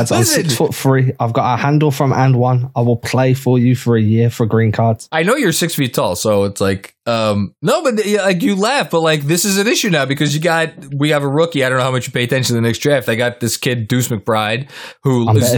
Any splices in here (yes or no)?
no